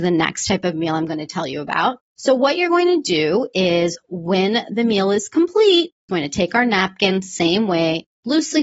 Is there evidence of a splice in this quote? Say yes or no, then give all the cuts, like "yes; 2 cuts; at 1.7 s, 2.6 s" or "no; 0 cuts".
yes; 1 cut; at 6.1 s